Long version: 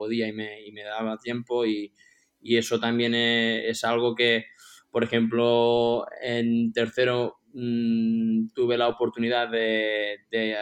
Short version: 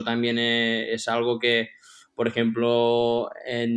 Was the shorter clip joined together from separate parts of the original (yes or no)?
no